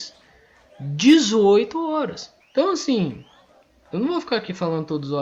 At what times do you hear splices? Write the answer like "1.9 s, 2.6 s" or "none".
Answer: 2.4 s